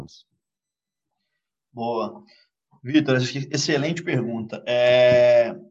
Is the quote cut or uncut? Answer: uncut